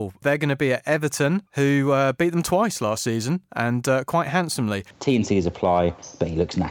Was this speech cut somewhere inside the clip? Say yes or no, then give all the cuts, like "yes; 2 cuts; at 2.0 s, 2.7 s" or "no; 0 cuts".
yes; 2 cuts; at 1.5 s, 4.9 s